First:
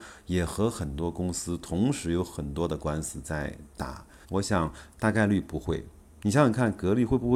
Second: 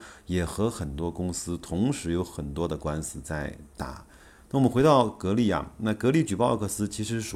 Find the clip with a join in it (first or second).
first